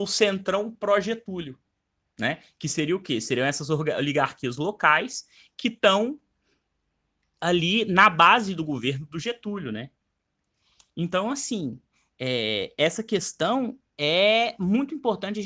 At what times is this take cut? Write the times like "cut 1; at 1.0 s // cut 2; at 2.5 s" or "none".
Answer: none